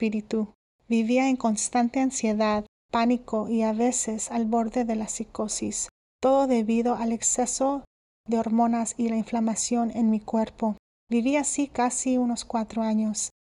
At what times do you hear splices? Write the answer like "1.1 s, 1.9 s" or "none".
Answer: none